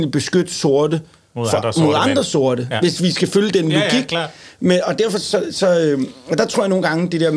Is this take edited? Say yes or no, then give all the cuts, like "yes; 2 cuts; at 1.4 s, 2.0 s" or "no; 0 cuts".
no; 0 cuts